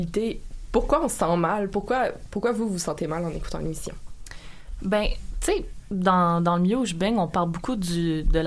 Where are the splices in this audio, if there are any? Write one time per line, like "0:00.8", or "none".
none